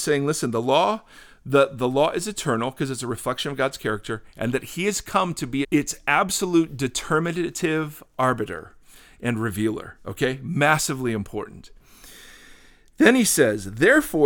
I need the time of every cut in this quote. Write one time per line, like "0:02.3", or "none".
0:05.6